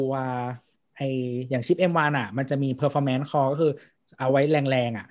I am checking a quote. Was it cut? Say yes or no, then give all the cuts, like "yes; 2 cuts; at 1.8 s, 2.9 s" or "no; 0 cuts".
no; 0 cuts